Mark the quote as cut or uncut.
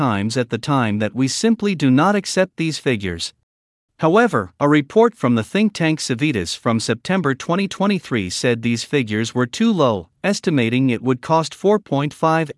cut